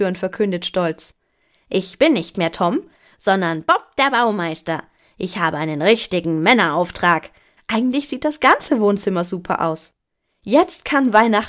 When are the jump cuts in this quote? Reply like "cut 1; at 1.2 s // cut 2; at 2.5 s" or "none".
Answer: cut 1; at 7.6 s